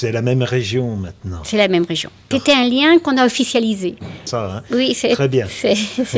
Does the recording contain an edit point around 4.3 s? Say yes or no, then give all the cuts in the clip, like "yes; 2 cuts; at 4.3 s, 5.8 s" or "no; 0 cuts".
yes; 2 cuts; at 2.3 s, 4.3 s